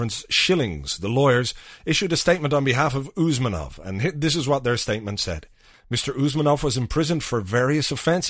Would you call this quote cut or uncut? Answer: cut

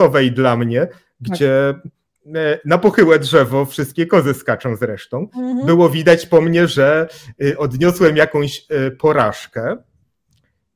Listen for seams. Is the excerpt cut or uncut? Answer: uncut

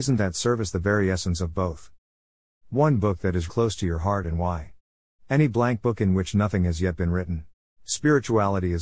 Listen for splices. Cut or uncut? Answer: cut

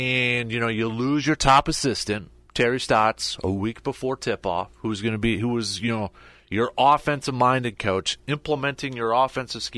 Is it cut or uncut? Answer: uncut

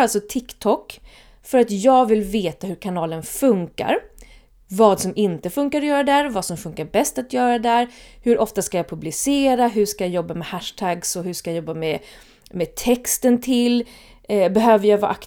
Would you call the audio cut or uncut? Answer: uncut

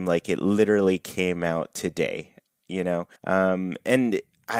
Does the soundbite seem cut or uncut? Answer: cut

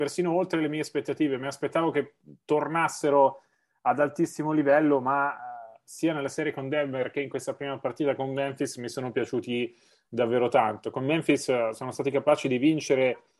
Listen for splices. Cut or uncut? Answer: uncut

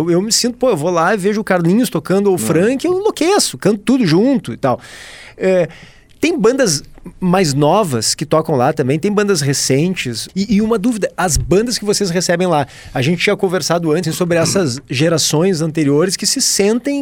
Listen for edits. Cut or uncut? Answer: cut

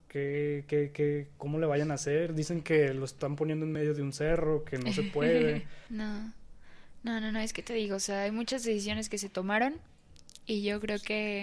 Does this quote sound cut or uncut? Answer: cut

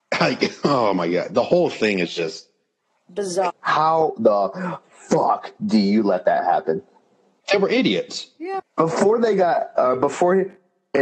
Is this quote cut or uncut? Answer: cut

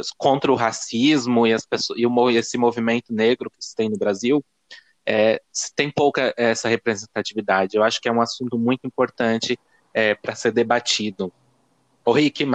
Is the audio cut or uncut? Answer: uncut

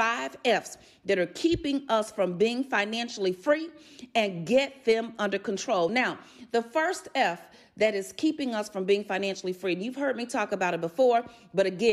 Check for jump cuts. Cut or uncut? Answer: uncut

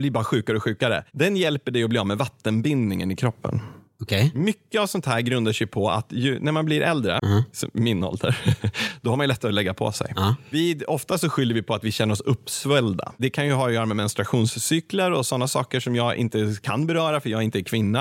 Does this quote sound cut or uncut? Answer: cut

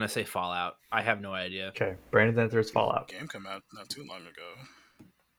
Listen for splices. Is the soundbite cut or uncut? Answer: cut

